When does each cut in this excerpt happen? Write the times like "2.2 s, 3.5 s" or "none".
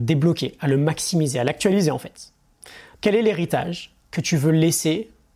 3.0 s, 4.0 s